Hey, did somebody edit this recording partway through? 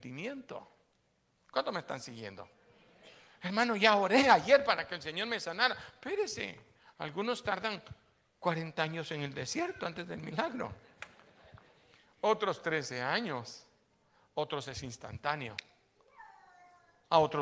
no; 0 cuts

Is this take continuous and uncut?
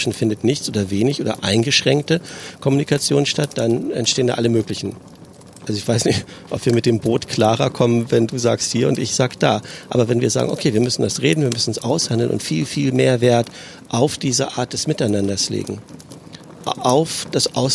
no; 2 cuts; at 12.4 s, 16.6 s

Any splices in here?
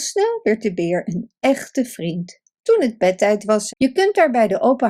yes; 2 cuts; at 2.6 s, 3.7 s

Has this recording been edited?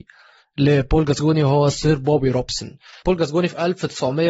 yes; 1 cut; at 3.0 s

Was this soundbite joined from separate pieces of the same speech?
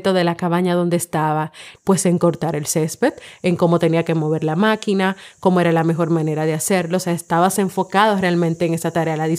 yes; 1 cut; at 1.8 s

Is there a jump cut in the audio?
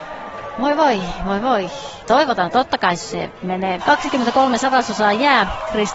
yes; 2 cuts; at 2.0 s, 3.8 s

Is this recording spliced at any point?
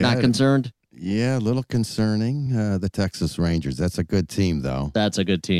no; 0 cuts

